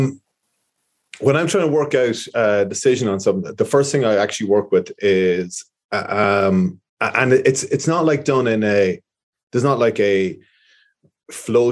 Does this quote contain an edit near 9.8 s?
no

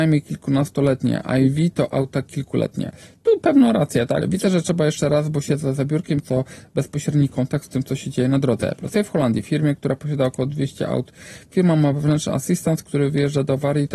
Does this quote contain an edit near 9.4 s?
no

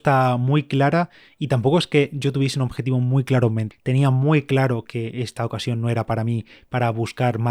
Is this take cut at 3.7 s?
yes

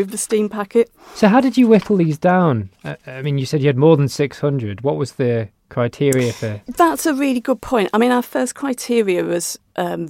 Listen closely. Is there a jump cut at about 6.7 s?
yes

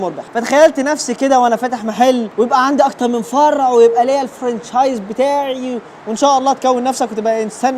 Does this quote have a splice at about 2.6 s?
no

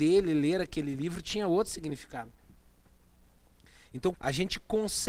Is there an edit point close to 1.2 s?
no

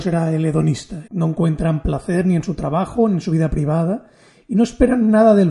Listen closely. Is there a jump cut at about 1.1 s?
yes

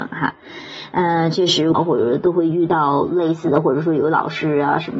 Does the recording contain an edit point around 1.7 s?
yes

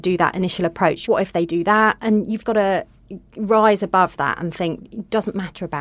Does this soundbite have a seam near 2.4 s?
yes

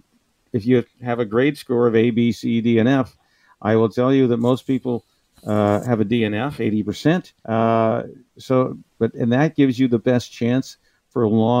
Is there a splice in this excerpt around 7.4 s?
yes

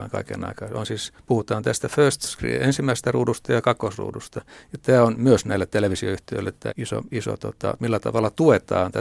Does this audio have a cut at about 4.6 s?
no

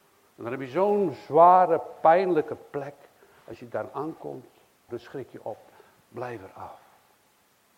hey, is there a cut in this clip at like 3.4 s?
no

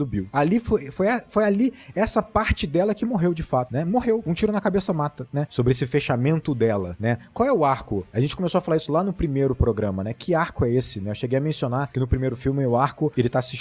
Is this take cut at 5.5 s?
yes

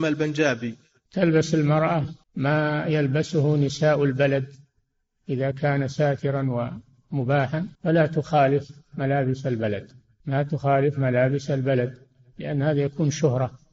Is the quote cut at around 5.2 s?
no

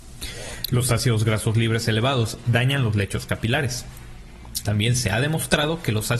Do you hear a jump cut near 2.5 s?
yes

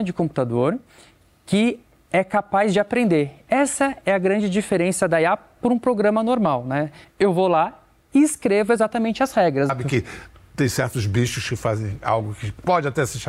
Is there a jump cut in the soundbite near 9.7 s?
yes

